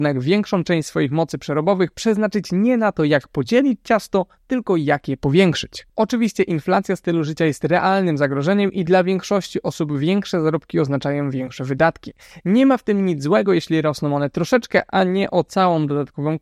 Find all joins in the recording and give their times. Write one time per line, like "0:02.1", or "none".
none